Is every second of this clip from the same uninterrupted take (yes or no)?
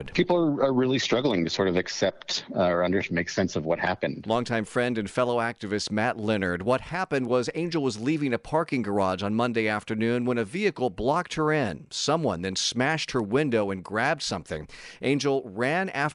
yes